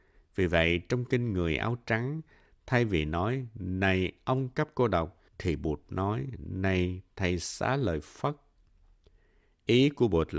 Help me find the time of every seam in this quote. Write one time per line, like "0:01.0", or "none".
0:05.3